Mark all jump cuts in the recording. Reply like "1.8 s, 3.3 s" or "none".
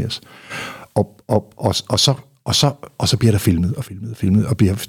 none